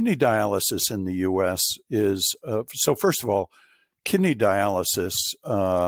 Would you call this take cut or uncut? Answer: uncut